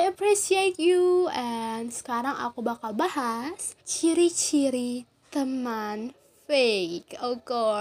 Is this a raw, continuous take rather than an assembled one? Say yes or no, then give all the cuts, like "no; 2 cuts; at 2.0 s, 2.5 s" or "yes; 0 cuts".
no; 1 cut; at 3.8 s